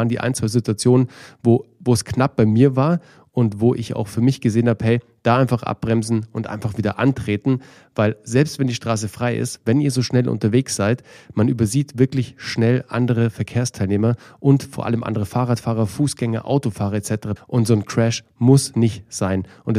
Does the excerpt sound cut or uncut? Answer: cut